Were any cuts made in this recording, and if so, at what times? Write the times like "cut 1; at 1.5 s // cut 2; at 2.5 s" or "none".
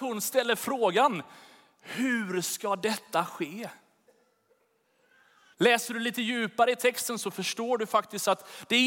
cut 1; at 5.5 s